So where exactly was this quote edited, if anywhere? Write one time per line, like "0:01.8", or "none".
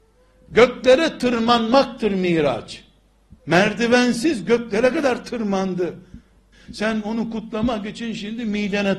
0:03.4
0:06.5